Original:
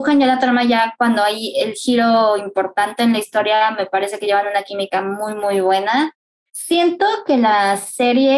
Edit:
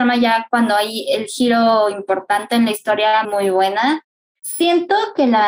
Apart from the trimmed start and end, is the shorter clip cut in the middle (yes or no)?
yes